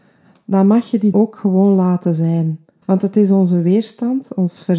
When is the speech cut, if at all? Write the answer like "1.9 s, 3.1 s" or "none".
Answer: 1.1 s, 2.8 s